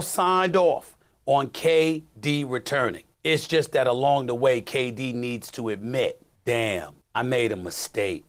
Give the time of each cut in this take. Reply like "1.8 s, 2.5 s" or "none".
none